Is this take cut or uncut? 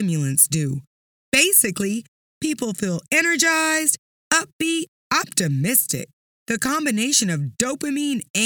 uncut